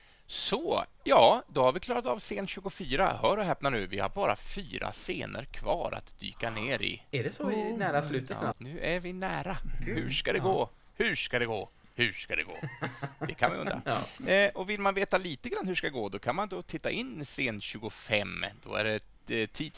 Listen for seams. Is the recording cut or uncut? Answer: cut